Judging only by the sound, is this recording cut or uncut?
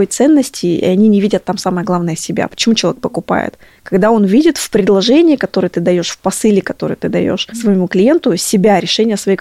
uncut